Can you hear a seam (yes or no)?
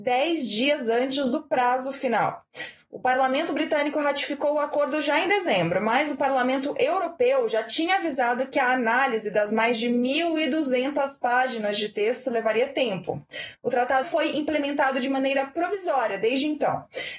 yes